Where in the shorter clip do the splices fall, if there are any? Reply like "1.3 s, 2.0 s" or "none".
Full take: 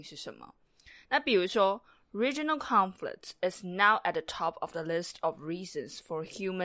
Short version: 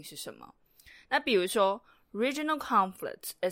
none